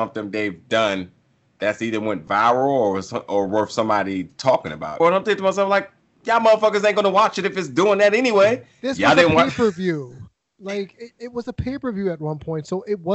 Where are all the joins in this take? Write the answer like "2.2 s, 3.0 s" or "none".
5.0 s